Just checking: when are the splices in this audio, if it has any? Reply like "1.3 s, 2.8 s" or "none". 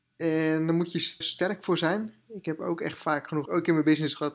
1.2 s, 3.5 s